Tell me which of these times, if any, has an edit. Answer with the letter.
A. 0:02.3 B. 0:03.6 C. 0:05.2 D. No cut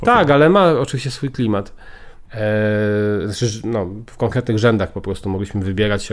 A